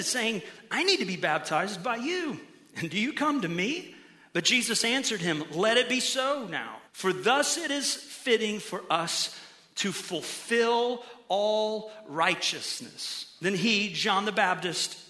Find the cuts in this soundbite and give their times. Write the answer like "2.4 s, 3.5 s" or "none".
6.9 s

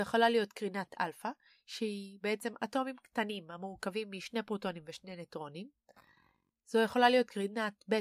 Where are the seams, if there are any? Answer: none

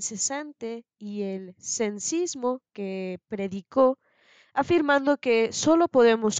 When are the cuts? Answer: none

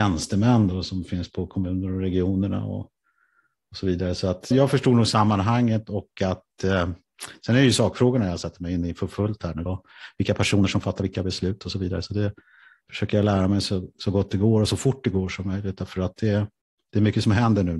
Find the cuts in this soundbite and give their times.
4.5 s, 9.7 s

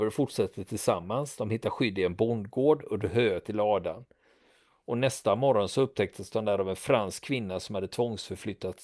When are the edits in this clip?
none

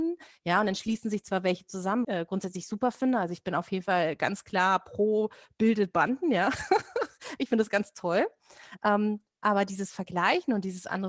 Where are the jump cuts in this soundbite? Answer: 2.0 s

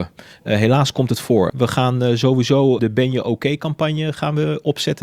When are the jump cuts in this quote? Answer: 1.5 s, 2.8 s

